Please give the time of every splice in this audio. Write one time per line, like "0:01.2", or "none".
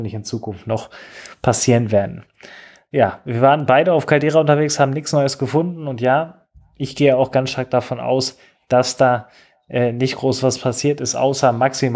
none